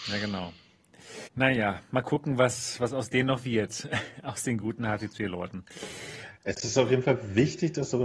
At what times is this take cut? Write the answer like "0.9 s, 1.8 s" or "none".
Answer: 1.3 s